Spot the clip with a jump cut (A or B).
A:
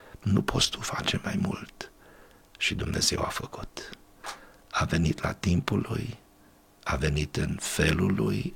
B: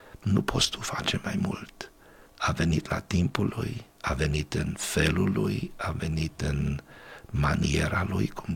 B